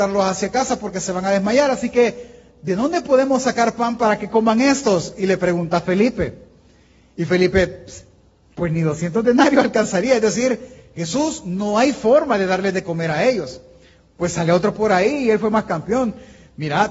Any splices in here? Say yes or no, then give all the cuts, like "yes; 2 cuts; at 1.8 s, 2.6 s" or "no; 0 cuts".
no; 0 cuts